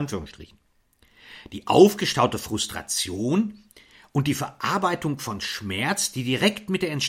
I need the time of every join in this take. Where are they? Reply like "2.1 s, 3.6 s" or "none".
none